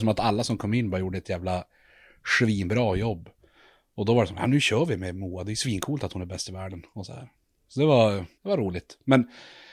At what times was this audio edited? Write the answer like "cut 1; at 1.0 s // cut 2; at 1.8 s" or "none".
cut 1; at 8.3 s